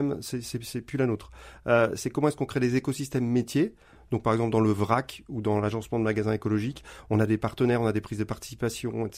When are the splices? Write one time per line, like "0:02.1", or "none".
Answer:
none